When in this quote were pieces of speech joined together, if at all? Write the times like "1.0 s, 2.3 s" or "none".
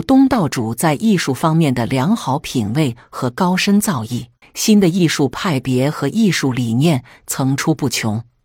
4.4 s